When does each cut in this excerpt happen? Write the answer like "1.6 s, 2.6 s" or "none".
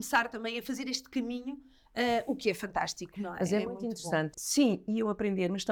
4.3 s